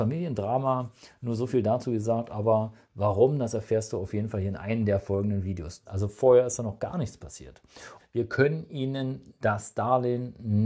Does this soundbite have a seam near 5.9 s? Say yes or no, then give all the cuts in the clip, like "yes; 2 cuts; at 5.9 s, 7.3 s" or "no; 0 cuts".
yes; 2 cuts; at 5.9 s, 8.0 s